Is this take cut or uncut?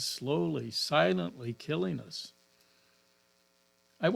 uncut